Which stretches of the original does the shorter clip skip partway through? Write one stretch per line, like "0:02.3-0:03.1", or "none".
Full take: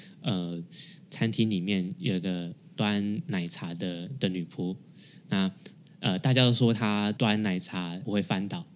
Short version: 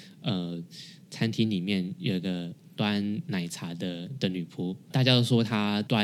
0:04.9-0:06.2

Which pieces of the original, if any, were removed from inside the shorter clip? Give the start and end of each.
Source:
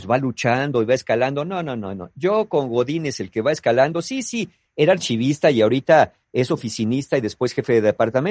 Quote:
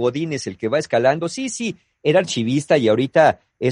none

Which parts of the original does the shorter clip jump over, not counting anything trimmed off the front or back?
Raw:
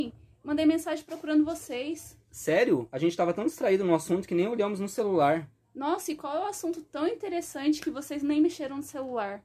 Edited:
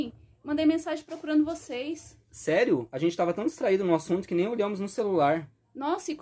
none

